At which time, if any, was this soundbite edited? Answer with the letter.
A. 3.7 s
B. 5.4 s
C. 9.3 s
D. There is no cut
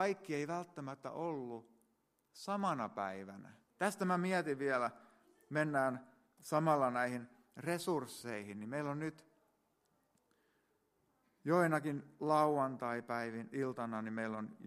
A